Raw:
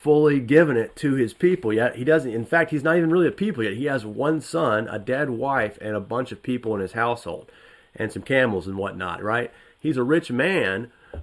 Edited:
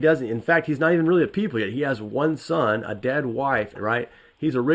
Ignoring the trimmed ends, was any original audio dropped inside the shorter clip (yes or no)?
yes